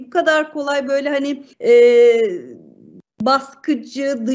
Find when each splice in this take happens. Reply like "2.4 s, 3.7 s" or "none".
1.5 s